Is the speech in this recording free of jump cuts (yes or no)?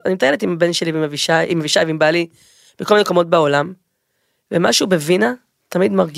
yes